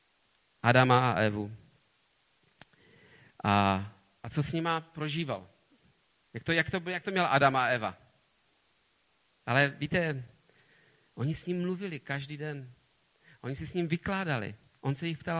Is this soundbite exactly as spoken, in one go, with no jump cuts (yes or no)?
no